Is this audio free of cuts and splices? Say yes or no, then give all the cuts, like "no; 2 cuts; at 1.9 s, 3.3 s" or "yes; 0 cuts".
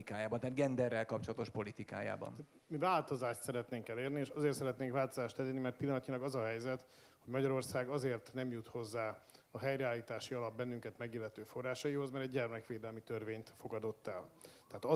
yes; 0 cuts